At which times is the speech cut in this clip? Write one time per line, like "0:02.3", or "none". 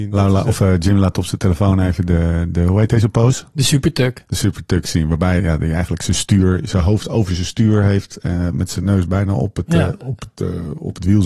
0:05.4